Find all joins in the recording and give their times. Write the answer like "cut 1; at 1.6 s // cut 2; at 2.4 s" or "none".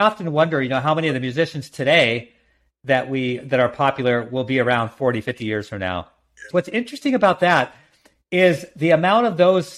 cut 1; at 6.5 s